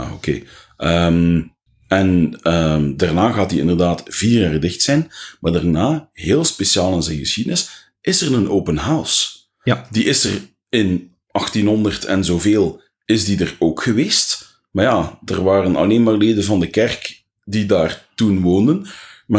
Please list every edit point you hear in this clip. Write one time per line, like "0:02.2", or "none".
none